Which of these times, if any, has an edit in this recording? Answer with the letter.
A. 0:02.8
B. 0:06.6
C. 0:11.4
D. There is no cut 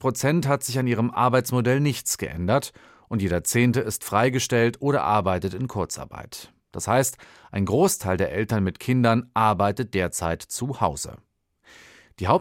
D